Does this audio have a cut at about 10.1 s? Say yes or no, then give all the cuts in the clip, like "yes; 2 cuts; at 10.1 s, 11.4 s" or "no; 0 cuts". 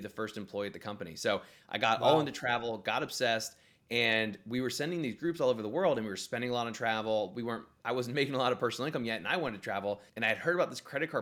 yes; 1 cut; at 10.1 s